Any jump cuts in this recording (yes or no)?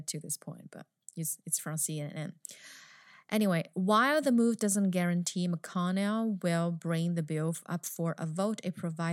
no